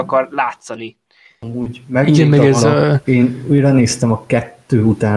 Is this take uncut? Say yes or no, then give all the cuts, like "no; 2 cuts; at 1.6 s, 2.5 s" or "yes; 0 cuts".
yes; 0 cuts